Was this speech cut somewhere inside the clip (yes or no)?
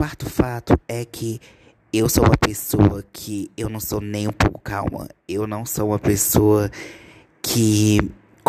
no